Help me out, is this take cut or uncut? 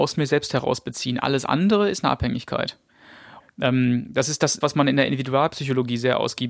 cut